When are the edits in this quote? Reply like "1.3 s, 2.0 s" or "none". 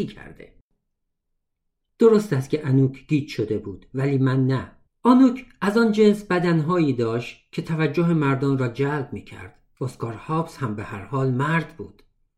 4.9 s